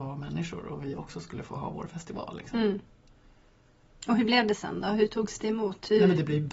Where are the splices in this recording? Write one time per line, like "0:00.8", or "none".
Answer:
none

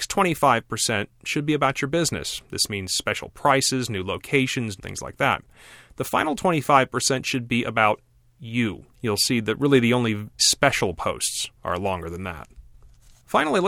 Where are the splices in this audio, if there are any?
0:04.8
0:08.9
0:10.4

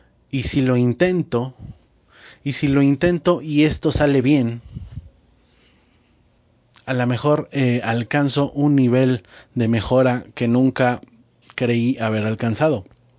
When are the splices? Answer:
none

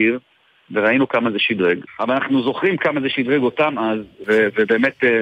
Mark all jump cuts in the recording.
0:01.9
0:04.2

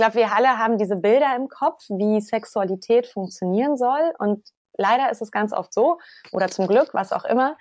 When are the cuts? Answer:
none

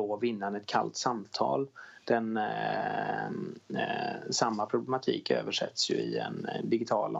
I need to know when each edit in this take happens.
none

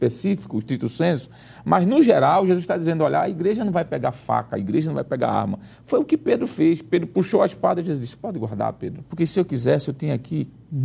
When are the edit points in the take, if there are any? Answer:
0:09.1

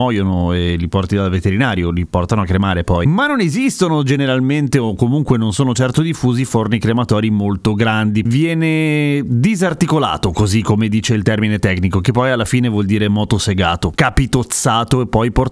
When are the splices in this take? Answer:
0:08.2

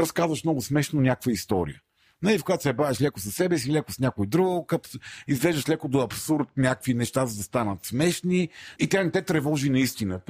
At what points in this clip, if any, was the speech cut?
0:08.8

